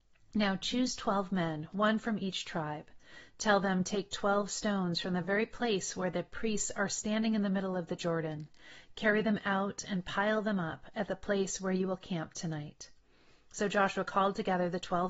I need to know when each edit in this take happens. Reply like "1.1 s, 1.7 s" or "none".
none